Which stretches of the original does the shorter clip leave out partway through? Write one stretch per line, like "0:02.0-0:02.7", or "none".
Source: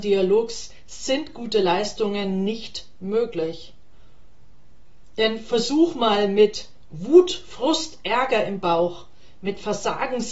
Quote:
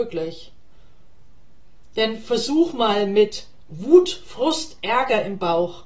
none